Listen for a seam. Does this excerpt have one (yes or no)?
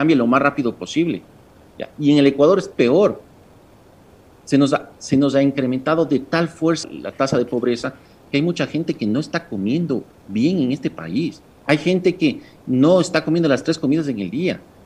yes